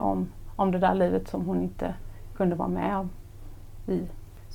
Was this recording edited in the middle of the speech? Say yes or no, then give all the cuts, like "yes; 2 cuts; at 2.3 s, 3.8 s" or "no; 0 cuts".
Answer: no; 0 cuts